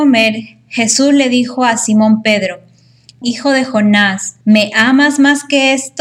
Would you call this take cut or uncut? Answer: cut